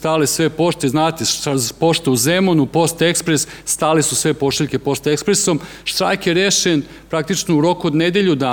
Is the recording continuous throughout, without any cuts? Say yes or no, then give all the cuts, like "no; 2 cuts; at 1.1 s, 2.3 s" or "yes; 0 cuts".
yes; 0 cuts